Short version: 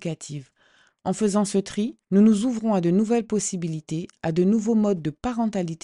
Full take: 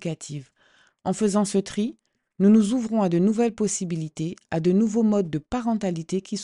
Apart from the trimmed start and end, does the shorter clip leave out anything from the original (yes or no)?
yes